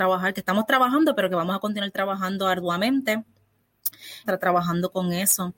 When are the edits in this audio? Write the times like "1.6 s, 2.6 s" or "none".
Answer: 4.2 s